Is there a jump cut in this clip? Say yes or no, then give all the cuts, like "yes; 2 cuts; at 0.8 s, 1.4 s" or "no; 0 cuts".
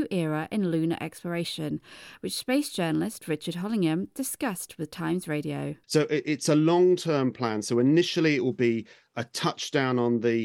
yes; 1 cut; at 5.8 s